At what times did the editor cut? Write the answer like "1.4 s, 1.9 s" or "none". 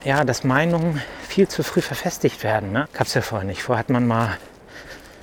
2.9 s